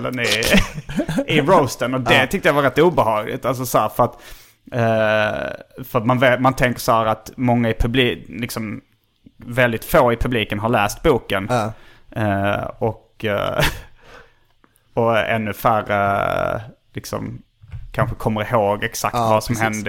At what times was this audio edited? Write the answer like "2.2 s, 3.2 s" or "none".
none